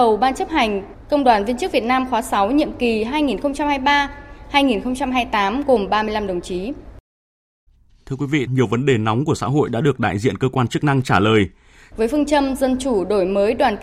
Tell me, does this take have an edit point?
yes; 2 cuts; at 8.5 s, 11.9 s

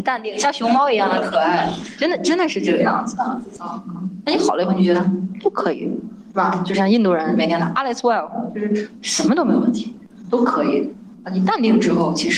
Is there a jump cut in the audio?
yes; 1 cut; at 3.6 s

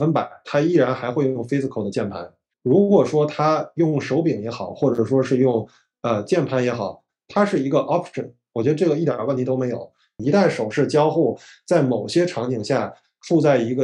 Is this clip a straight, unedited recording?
no; 2 cuts; at 2.5 s, 10.2 s

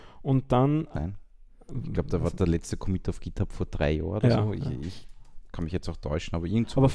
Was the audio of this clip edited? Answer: yes; 1 cut; at 1.0 s

